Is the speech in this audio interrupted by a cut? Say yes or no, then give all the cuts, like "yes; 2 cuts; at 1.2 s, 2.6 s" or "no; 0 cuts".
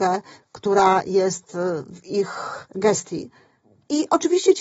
yes; 1 cut; at 2.7 s